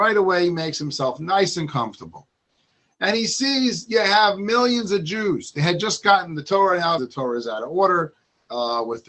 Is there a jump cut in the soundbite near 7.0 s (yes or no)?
yes